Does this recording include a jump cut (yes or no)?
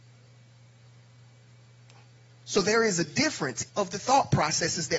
yes